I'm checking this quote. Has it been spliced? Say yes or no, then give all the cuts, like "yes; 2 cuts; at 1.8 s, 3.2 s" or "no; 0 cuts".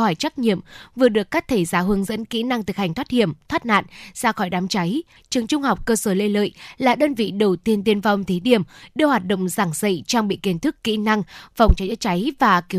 yes; 1 cut; at 5.2 s